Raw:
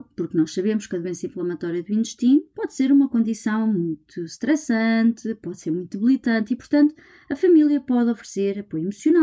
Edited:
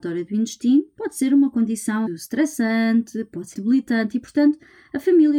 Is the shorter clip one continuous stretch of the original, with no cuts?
no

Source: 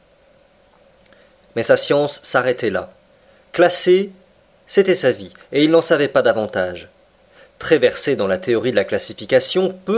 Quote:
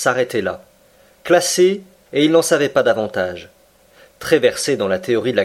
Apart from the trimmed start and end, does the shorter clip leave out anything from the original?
yes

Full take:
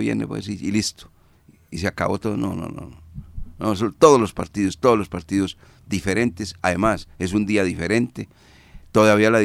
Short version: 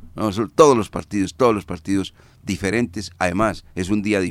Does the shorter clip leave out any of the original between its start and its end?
no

